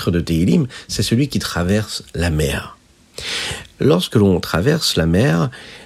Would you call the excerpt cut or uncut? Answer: uncut